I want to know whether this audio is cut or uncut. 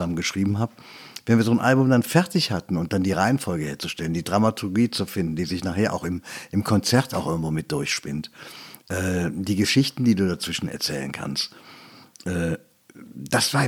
uncut